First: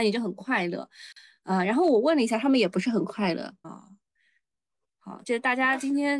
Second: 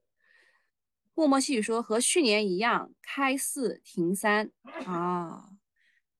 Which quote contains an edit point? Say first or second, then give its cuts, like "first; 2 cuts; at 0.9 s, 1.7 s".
first; 2 cuts; at 3.6 s, 5.2 s